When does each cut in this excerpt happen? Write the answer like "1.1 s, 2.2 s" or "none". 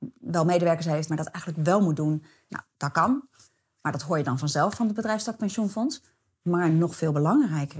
1.1 s, 2.5 s